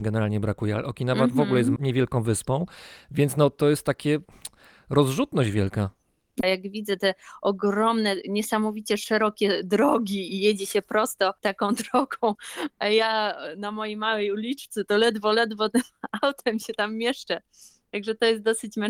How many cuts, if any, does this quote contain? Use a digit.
2